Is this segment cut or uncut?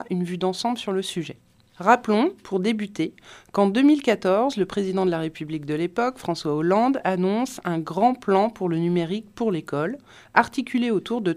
uncut